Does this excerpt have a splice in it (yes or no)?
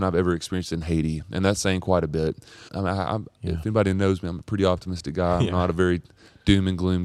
yes